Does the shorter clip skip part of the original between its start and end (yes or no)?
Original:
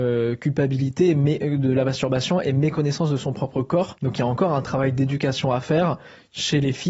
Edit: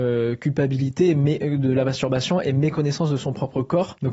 no